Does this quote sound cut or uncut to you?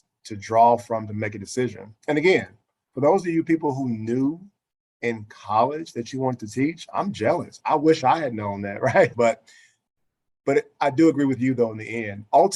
cut